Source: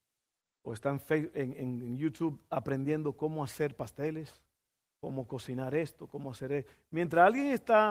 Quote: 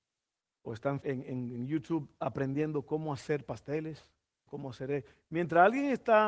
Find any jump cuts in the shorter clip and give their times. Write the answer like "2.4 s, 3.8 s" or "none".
1.0 s, 4.5 s